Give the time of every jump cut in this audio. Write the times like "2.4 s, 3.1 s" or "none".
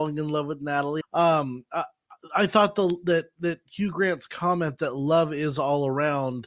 1.0 s